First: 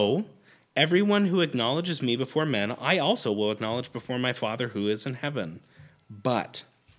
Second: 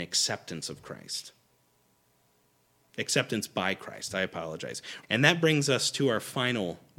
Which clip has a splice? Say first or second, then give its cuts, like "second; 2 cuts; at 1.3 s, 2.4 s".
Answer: second; 1 cut; at 5.0 s